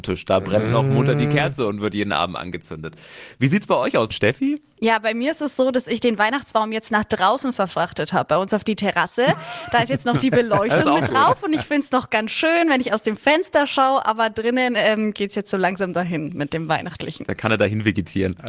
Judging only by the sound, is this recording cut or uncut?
uncut